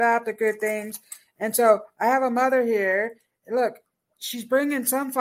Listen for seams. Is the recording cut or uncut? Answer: uncut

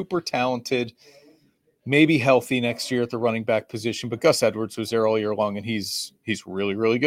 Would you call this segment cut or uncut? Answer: uncut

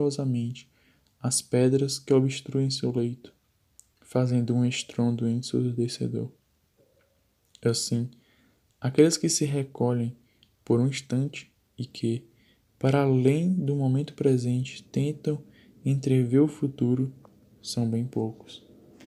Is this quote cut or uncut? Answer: uncut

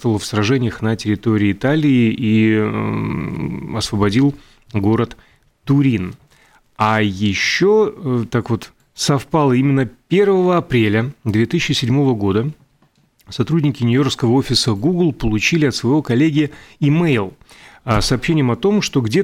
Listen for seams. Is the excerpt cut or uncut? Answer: uncut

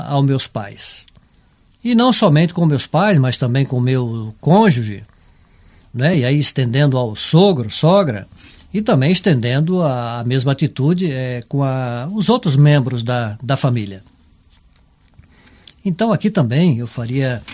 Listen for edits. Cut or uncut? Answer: uncut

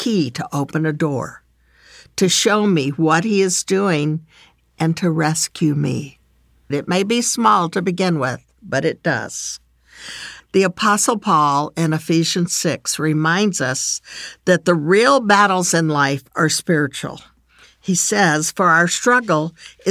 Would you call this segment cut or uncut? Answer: cut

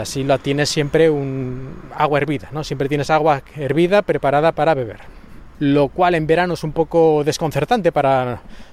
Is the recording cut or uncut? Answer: uncut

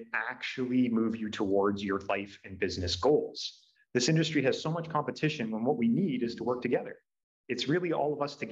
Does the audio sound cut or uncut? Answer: cut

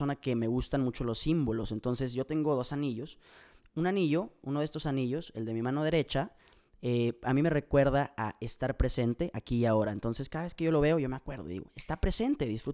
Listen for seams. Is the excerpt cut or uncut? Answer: uncut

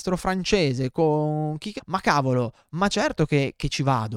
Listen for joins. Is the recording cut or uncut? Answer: cut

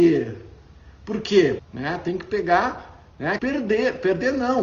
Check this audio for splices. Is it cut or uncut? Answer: cut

